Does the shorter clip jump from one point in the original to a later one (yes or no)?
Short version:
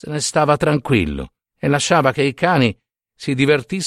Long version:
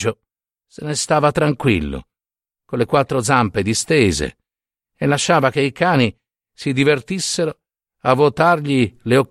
yes